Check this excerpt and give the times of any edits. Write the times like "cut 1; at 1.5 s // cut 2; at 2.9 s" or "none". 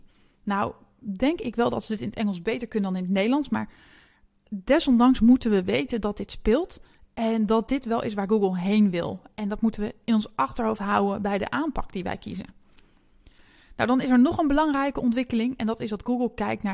none